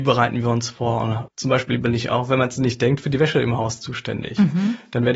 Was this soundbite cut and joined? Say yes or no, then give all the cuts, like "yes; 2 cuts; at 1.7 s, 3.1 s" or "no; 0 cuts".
yes; 1 cut; at 1.3 s